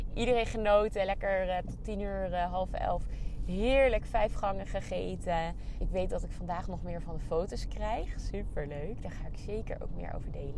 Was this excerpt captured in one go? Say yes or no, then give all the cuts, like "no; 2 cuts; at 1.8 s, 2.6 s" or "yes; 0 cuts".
no; 1 cut; at 5.8 s